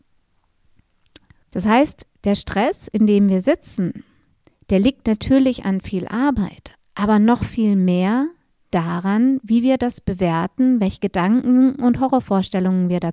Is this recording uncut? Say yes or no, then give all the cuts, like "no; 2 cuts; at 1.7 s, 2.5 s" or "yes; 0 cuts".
no; 1 cut; at 1.4 s